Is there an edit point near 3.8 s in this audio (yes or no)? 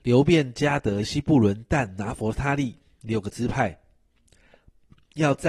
no